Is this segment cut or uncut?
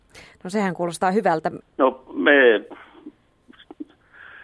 cut